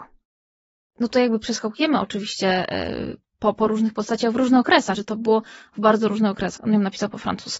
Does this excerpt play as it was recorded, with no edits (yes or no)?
no